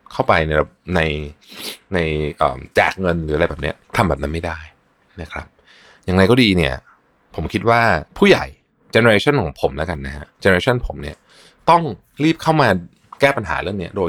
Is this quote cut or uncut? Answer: cut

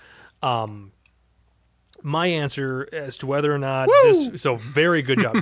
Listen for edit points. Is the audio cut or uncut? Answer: uncut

